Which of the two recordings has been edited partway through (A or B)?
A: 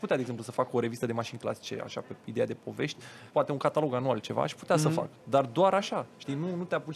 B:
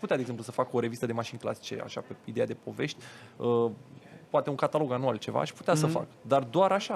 A